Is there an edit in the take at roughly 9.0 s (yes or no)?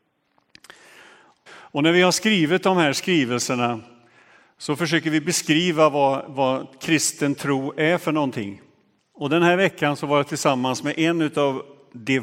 yes